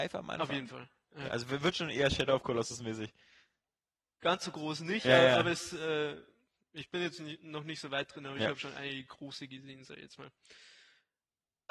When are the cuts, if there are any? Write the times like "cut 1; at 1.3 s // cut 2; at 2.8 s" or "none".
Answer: none

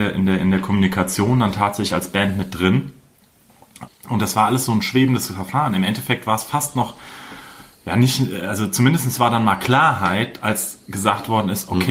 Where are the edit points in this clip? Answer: cut 1; at 3.9 s

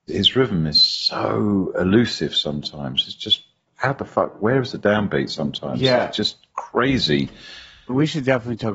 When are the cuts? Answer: none

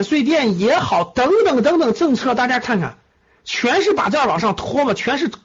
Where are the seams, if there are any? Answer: none

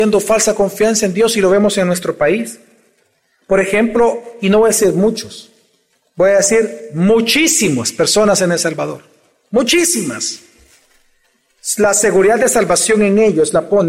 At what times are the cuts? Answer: none

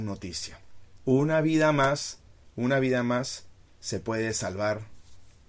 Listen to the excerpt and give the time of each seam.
cut 1; at 1.0 s

